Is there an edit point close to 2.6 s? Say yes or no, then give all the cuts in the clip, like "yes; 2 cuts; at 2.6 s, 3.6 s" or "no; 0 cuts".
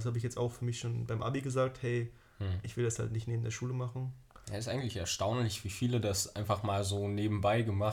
no; 1 cut; at 4.4 s